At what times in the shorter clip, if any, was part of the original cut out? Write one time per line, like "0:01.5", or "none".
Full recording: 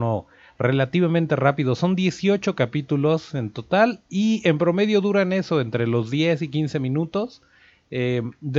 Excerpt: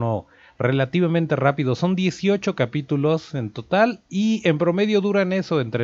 none